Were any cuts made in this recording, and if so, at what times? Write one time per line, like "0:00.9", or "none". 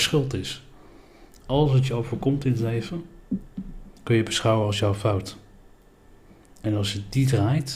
0:04.0